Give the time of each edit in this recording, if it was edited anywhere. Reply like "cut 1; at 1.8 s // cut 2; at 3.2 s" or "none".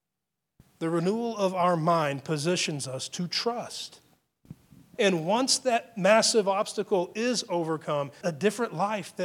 cut 1; at 4.9 s // cut 2; at 8.2 s